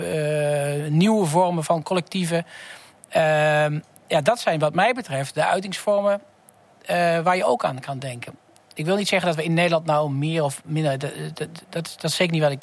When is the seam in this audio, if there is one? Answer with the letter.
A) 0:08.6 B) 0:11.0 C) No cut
A